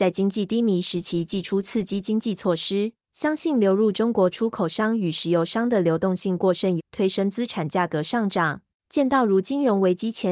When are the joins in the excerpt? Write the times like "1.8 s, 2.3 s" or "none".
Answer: 3.0 s, 6.8 s, 8.7 s